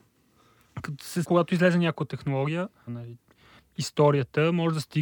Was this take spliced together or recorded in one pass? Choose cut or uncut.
cut